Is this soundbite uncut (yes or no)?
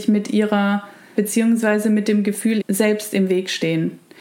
no